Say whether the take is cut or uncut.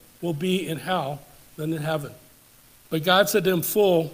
cut